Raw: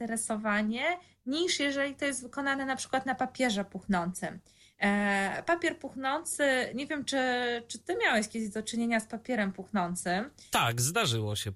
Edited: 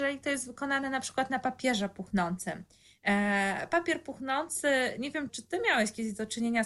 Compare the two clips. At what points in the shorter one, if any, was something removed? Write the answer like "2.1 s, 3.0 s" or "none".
5.3 s